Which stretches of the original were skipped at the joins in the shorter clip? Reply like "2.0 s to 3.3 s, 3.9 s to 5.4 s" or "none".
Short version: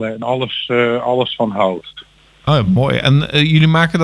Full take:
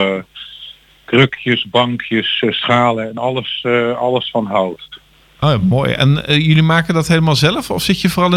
none